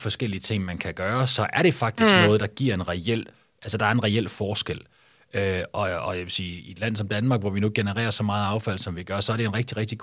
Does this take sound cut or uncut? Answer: uncut